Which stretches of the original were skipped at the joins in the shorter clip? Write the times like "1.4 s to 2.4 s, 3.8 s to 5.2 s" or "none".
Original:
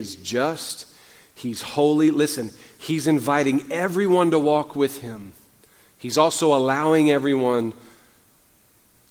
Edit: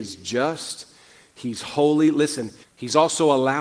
2.6 s to 5.8 s